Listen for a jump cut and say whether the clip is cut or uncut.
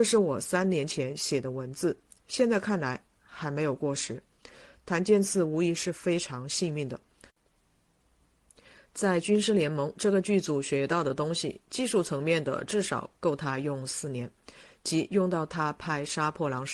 uncut